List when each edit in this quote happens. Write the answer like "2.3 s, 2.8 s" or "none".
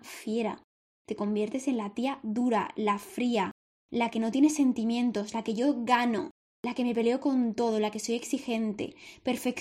6.5 s